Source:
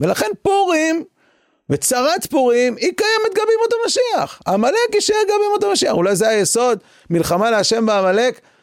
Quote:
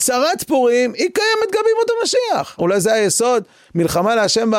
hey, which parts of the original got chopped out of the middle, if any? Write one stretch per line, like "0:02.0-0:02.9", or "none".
0:04.4-0:05.9